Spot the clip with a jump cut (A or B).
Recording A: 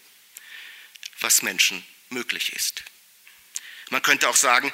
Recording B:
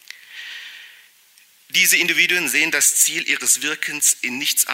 A